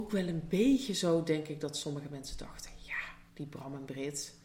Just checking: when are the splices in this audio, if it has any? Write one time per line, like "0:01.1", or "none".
0:03.3